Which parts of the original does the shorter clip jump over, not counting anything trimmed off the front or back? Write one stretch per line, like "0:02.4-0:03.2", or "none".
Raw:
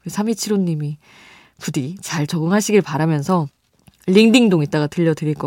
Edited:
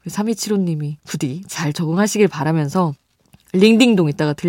0:01.0-0:01.5